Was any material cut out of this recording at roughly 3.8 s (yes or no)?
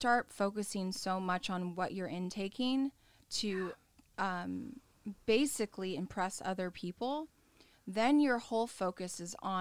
no